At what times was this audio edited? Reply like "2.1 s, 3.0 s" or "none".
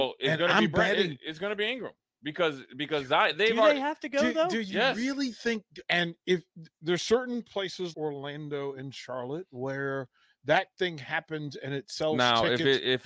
5.9 s, 7.9 s